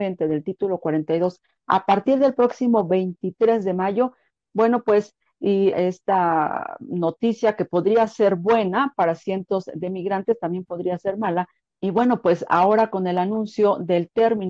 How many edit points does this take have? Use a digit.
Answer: 2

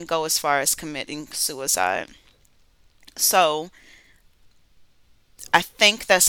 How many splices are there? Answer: 0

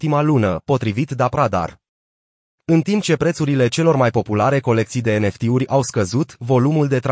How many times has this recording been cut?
1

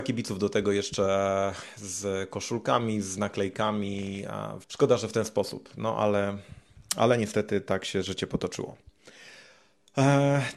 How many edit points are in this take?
1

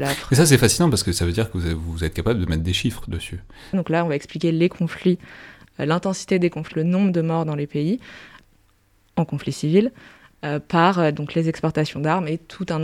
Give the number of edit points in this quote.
2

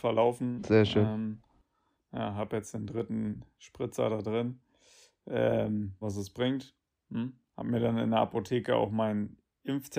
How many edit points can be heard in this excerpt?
1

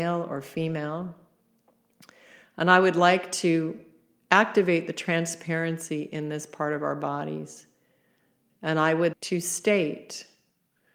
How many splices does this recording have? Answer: 1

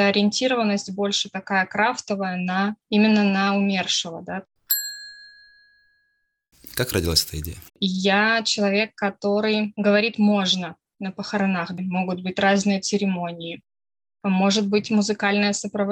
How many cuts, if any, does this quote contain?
3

